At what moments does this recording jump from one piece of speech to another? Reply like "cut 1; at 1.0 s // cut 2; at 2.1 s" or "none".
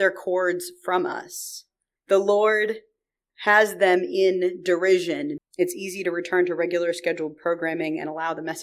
cut 1; at 2.0 s // cut 2; at 5.4 s